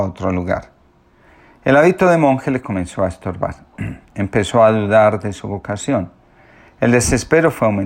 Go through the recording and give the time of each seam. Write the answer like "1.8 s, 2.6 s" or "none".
none